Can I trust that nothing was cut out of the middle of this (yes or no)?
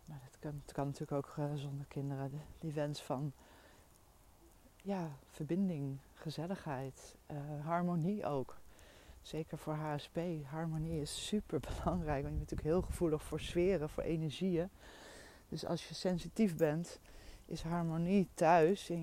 yes